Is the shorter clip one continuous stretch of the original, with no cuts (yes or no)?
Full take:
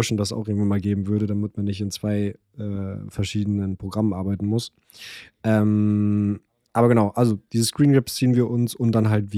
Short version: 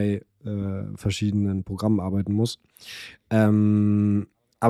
yes